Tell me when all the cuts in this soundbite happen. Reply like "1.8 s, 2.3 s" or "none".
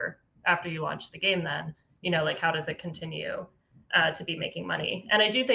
none